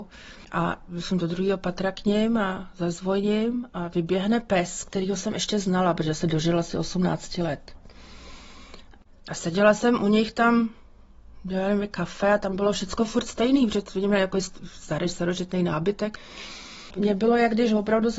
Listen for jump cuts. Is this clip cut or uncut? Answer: uncut